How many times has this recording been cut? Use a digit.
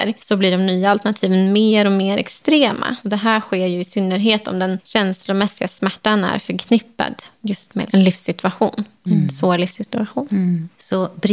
0